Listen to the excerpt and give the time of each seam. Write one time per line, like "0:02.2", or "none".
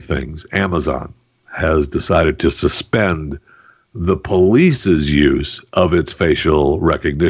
none